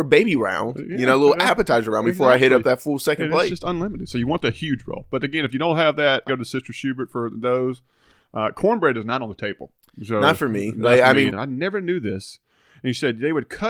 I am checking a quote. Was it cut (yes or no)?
yes